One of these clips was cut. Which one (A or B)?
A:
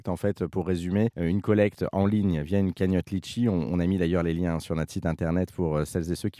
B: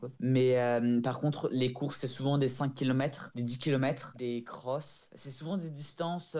B